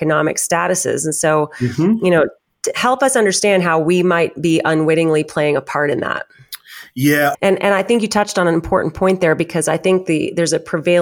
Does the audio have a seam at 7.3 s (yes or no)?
yes